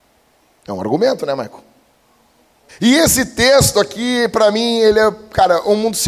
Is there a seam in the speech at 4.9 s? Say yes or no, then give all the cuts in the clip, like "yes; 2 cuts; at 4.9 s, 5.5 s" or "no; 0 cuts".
no; 1 cut; at 2.7 s